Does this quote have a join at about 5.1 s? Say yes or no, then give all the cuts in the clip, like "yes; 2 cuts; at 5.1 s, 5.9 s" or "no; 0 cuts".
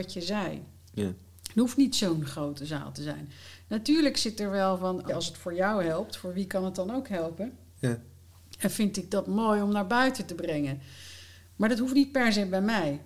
yes; 1 cut; at 5.1 s